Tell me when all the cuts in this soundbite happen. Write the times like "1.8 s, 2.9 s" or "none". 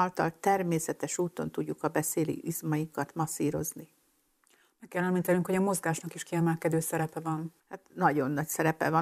7.6 s